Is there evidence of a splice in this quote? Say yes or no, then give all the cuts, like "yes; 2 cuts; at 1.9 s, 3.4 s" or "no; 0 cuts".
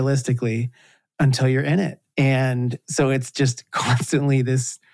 yes; 1 cut; at 2.1 s